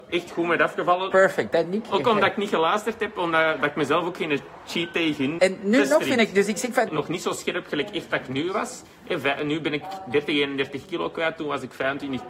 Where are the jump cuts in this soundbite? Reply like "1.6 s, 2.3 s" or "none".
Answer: 1.1 s, 5.4 s, 6.9 s

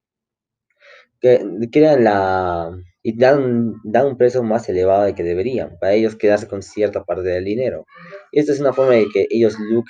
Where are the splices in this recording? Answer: 3.0 s

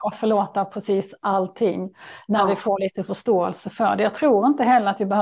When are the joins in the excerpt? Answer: none

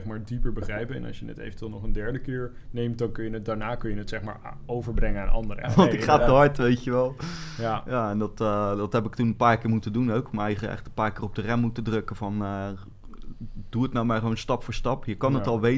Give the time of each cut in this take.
5.6 s

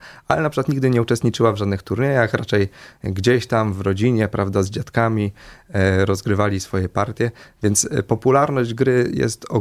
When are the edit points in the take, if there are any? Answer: none

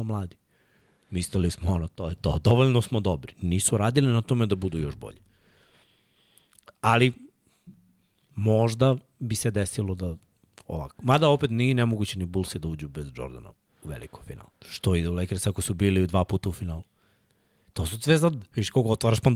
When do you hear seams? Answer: 14.5 s

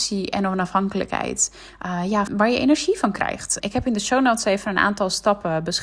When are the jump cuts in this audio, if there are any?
2.3 s, 3.6 s

